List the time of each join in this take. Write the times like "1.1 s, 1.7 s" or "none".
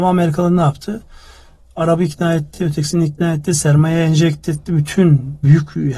none